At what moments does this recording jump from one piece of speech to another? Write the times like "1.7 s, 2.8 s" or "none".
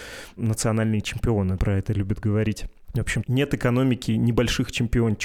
1.6 s